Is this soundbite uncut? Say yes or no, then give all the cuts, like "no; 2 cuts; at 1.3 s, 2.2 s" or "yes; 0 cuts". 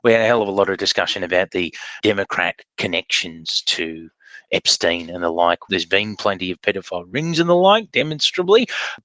no; 2 cuts; at 2.0 s, 5.7 s